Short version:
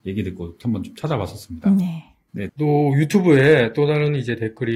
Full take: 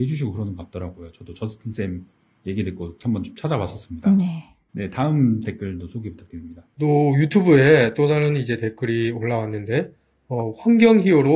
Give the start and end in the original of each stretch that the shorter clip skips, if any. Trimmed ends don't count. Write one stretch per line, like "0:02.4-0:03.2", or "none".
0:04.9-0:06.7